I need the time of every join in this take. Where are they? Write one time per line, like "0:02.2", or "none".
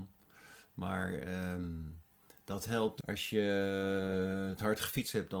0:03.0